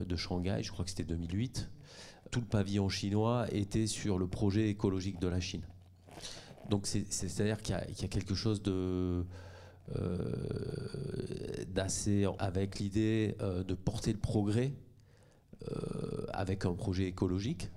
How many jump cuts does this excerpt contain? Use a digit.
2